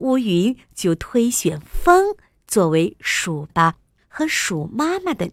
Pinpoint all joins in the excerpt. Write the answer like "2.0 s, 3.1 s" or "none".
3.5 s